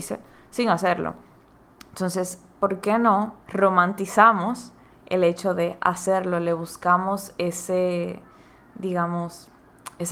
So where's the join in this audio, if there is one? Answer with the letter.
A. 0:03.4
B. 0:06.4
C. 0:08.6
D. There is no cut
A